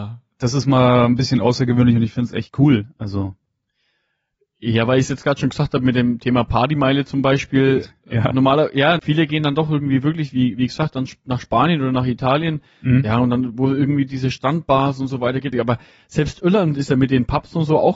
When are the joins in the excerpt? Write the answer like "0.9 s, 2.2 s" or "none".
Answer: 9.0 s, 15.5 s